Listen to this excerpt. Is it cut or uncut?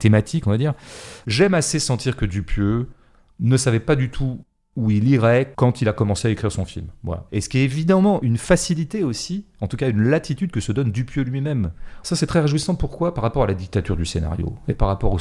cut